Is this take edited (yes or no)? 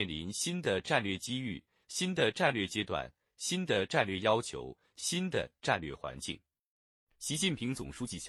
yes